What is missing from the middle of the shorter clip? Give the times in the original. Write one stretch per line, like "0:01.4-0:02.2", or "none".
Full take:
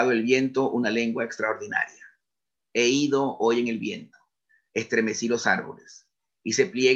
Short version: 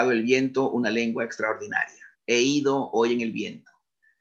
0:02.1-0:02.6

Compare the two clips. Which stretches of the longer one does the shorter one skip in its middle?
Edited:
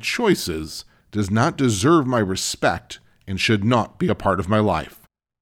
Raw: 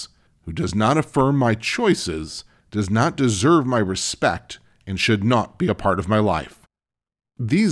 none

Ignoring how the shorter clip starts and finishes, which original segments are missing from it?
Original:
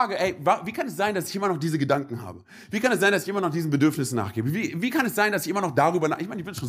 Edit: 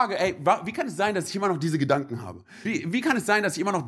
0:02.6-0:04.5

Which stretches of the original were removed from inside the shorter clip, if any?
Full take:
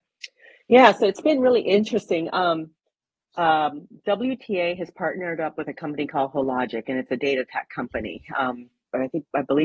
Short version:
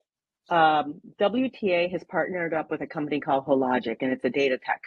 none

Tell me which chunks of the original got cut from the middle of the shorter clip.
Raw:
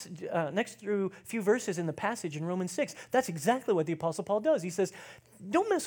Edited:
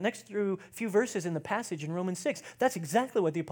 none

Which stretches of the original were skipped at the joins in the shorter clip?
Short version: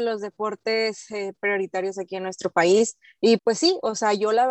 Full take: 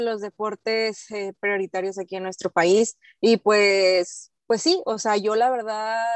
0:03.4-0:04.4

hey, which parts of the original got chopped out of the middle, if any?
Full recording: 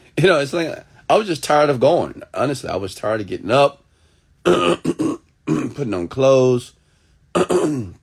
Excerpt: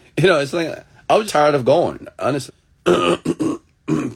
0:01.3-0:01.4
0:02.6-0:04.1

